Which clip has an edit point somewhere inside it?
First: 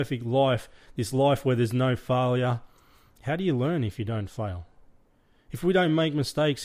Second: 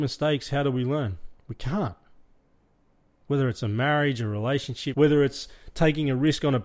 second; 2 cuts; at 1.4 s, 4.9 s

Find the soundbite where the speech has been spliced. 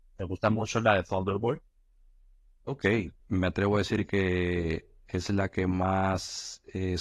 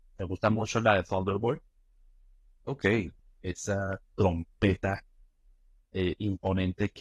first; 1 cut; at 3.2 s

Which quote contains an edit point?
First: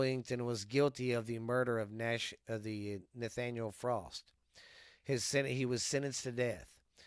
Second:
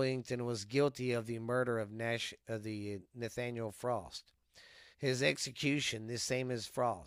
second; 1 cut; at 4.9 s

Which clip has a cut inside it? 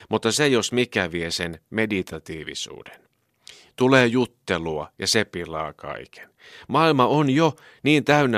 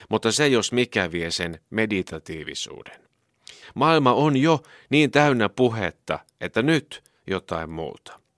second; 1 cut; at 3.6 s

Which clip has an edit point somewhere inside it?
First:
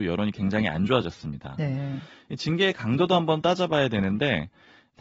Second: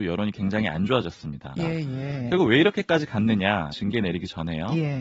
second; 2 cuts; at 1.6 s, 3.7 s

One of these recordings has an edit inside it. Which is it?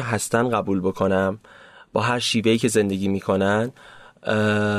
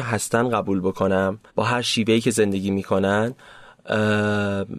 second; 1 cut; at 1.5 s

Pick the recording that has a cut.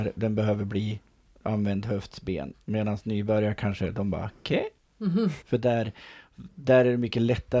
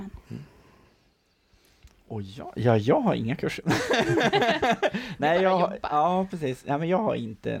first; 2 cuts; at 2.5 s, 5.4 s

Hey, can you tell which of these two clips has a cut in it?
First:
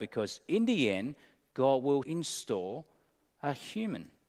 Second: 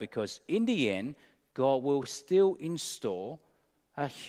first; 1 cut; at 2.0 s

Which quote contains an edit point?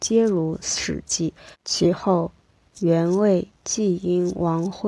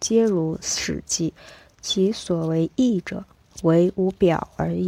first; 1 cut; at 1.5 s

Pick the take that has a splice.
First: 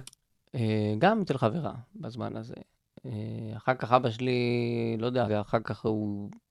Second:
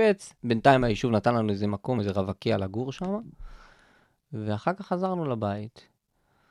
first; 1 cut; at 5.3 s

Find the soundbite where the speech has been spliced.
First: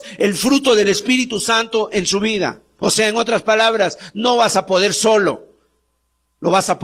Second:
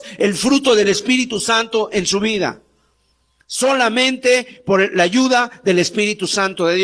first; 1 cut; at 2.8 s

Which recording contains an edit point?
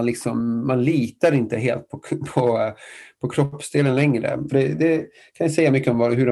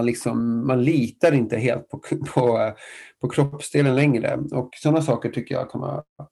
first; 1 cut; at 4.5 s

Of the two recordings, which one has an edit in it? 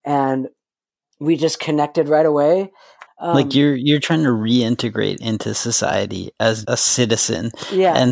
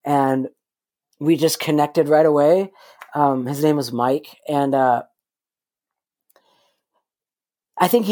first; 2 cuts; at 3.1 s, 6.6 s

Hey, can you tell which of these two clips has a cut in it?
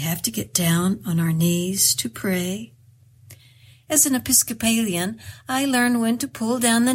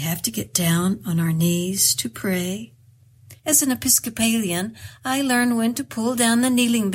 second; 1 cut; at 3.4 s

